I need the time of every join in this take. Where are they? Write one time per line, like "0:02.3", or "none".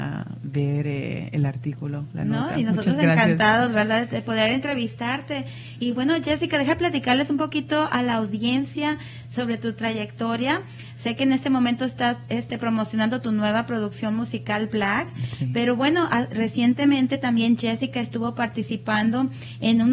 none

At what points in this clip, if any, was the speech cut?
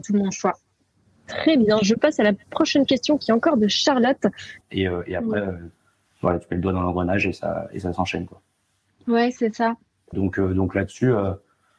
0:04.6
0:10.1

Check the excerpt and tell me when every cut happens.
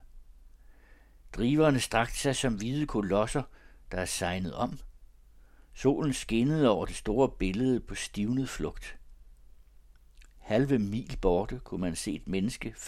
none

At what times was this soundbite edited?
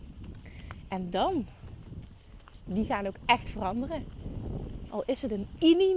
0:02.7
0:04.9

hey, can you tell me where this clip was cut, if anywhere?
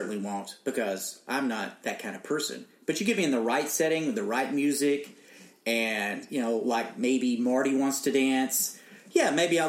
none

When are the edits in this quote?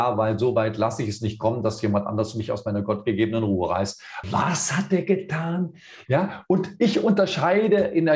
0:04.2
0:06.1

